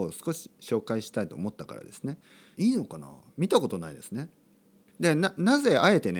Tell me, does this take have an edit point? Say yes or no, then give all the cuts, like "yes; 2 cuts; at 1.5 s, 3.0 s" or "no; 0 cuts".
yes; 2 cuts; at 2.6 s, 4.9 s